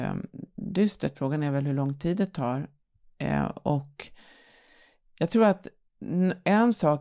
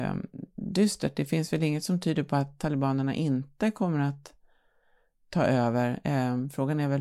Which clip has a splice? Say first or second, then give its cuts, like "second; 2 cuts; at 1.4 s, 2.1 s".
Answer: first; 1 cut; at 1.1 s